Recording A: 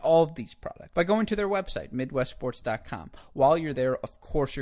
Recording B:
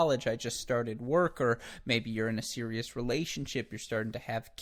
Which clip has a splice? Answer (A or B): A